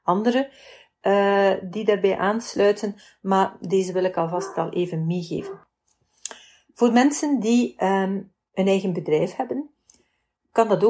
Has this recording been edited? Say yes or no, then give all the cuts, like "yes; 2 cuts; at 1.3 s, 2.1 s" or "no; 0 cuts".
no; 0 cuts